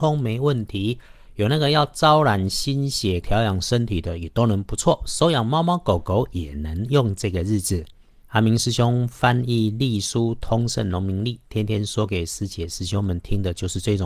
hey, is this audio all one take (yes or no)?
no